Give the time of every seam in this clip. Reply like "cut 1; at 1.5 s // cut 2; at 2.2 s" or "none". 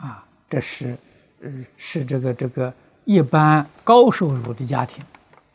cut 1; at 1.7 s